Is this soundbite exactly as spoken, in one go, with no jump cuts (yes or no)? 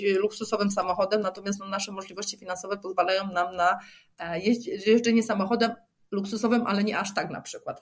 yes